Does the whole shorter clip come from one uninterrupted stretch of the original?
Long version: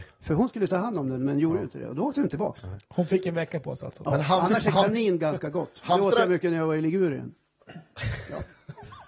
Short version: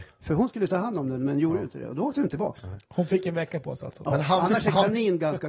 yes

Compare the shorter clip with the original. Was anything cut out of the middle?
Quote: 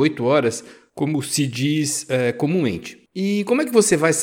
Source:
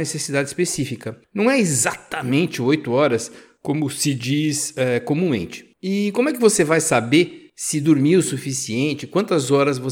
no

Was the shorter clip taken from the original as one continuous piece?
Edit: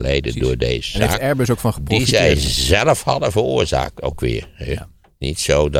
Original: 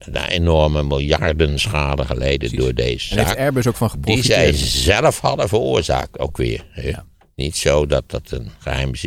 yes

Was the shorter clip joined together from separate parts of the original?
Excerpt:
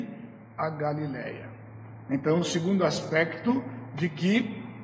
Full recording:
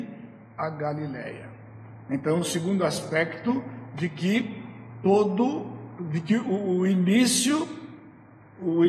no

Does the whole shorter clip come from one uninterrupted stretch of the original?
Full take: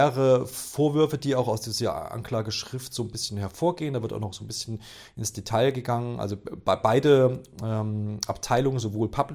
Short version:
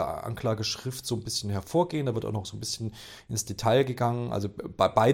yes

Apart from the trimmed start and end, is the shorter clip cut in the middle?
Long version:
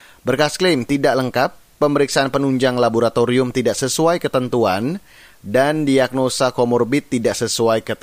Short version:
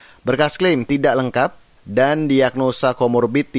yes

